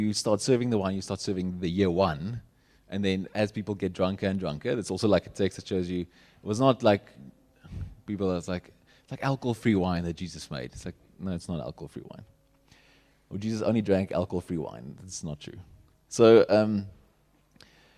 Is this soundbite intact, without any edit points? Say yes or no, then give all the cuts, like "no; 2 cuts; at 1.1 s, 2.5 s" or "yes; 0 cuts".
yes; 0 cuts